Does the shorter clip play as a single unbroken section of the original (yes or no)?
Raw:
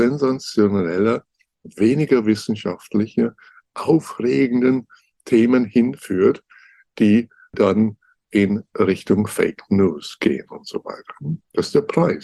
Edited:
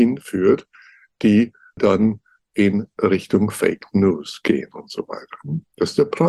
yes